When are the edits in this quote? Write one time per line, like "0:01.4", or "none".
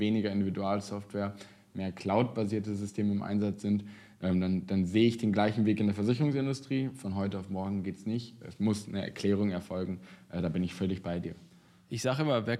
none